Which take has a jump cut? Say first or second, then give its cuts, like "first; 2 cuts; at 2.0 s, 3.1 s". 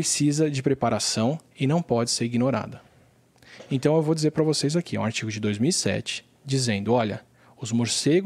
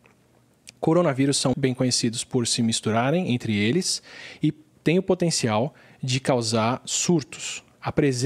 second; 1 cut; at 1.5 s